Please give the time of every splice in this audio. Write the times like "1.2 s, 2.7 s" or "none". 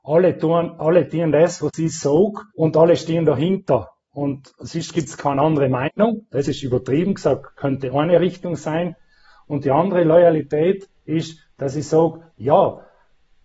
2.5 s